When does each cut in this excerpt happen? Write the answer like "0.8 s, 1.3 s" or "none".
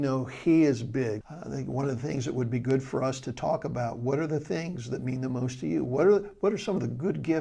1.2 s